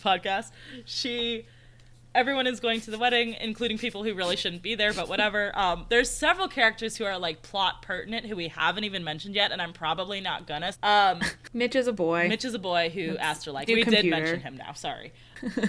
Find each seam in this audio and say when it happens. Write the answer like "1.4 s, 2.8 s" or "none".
10.7 s, 13.7 s